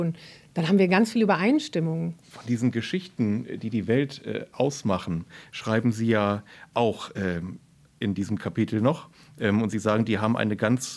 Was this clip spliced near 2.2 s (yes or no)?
yes